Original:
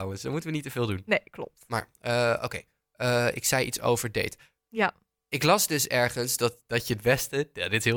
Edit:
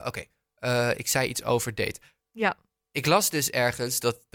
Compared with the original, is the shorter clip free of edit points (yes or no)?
yes